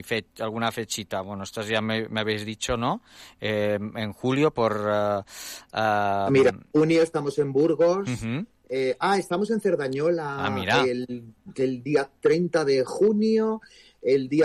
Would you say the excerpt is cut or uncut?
uncut